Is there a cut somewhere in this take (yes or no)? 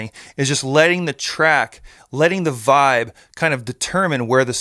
no